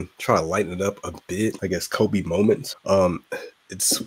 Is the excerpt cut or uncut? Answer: cut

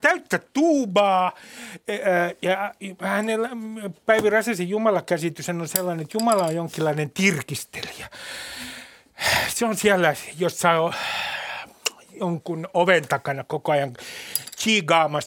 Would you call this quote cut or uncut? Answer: uncut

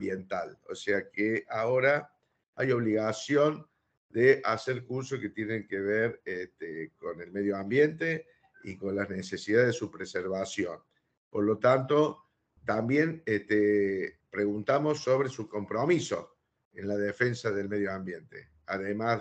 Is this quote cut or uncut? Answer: cut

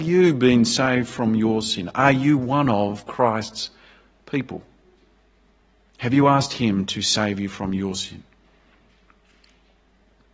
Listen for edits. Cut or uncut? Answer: uncut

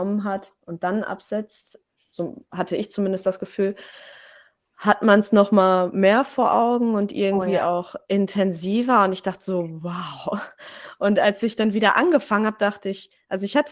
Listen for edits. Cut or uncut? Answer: uncut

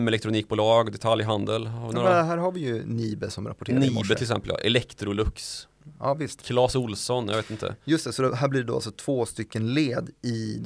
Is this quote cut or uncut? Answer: uncut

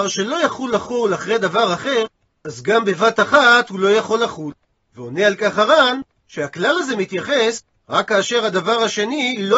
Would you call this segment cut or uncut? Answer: uncut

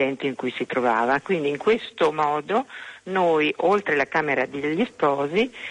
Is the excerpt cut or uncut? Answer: uncut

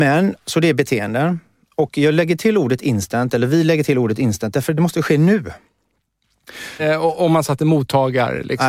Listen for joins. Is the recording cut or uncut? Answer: cut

